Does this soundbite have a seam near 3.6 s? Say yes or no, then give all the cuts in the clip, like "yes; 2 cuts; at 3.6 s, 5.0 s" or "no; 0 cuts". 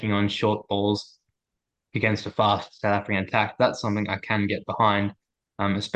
no; 0 cuts